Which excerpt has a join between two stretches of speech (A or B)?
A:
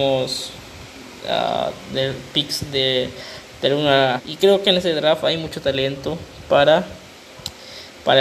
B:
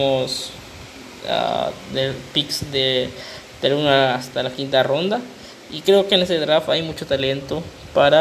A